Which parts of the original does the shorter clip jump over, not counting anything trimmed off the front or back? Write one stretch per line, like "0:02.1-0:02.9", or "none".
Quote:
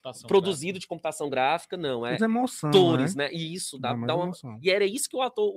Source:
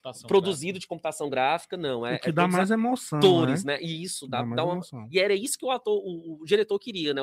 0:02.2-0:02.7

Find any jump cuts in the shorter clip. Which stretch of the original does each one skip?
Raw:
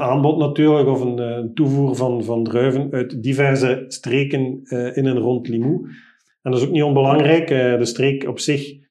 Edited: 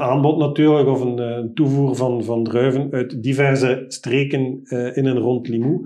none

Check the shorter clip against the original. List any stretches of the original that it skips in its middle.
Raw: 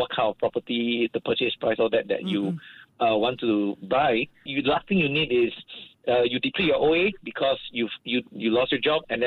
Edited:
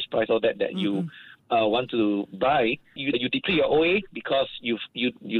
0:04.6-0:06.2

